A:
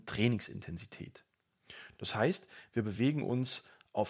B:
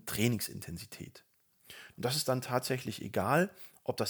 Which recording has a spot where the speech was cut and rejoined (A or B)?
B